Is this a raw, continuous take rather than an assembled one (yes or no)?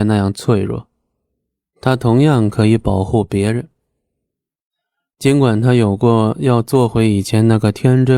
yes